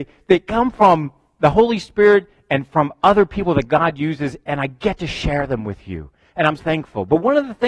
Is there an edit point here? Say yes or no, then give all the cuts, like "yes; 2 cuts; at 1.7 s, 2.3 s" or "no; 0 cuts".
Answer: yes; 1 cut; at 6.6 s